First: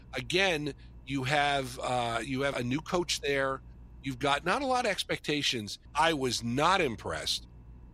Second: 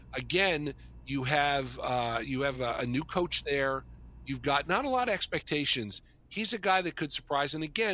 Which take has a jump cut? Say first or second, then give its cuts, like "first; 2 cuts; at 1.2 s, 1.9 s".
first; 2 cuts; at 2.5 s, 5.9 s